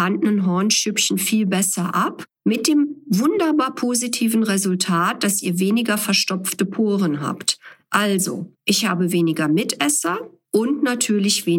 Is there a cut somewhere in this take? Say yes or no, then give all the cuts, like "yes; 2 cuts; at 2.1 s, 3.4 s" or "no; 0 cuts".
yes; 2 cuts; at 8.6 s, 10.4 s